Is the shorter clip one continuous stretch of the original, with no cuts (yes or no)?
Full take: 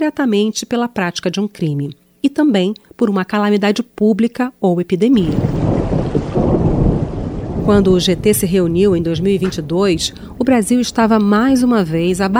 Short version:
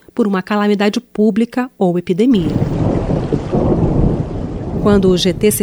yes